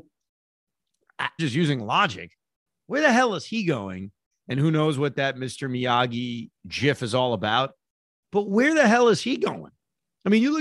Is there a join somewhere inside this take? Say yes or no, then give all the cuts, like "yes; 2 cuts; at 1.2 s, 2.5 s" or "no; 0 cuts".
yes; 2 cuts; at 1.4 s, 4.3 s